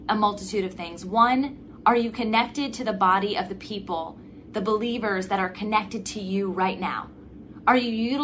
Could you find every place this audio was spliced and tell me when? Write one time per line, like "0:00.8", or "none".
none